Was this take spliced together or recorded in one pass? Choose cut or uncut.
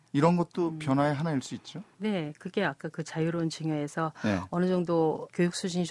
uncut